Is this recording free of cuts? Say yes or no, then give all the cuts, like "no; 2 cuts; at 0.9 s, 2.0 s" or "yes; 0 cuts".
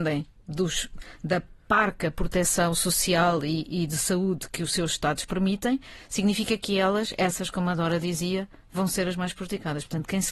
yes; 0 cuts